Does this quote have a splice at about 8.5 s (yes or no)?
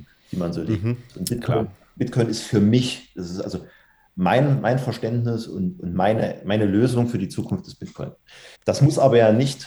yes